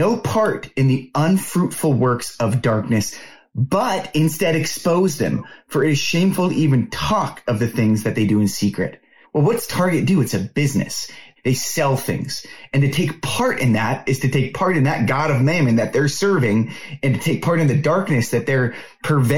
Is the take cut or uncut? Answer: cut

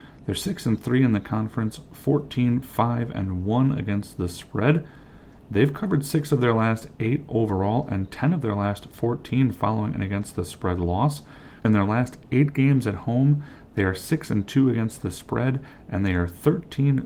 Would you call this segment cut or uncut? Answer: cut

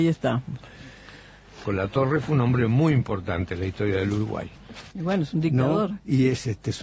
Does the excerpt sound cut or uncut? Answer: cut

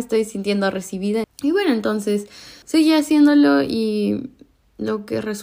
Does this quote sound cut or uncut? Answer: cut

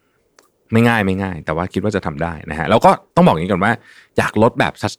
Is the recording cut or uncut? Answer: uncut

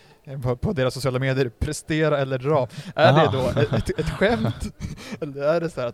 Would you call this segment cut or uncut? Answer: uncut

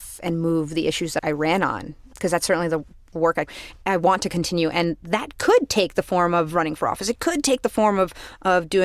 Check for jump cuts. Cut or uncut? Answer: cut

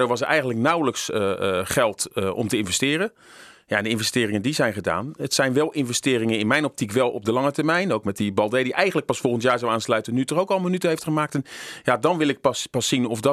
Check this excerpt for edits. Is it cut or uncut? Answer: uncut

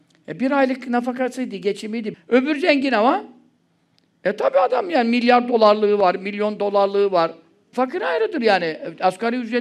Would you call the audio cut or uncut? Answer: cut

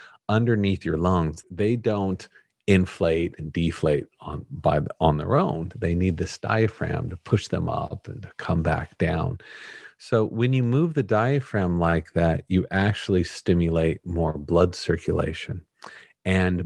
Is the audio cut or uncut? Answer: cut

